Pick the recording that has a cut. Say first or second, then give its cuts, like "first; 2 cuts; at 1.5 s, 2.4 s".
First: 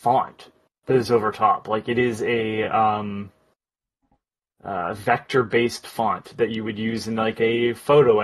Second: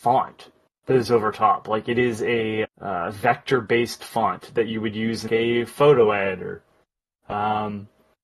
second; 2 cuts; at 2.6 s, 5.3 s